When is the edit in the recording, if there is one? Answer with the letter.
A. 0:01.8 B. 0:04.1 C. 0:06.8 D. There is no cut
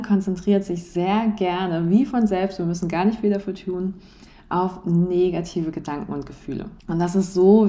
C